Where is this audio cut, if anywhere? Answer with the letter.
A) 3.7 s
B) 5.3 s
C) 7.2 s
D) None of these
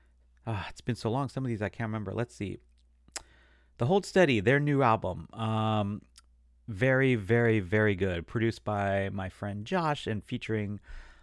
D